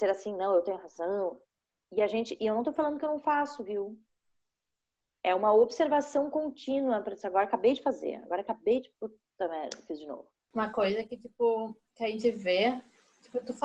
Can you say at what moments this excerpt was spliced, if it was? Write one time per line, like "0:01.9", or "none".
none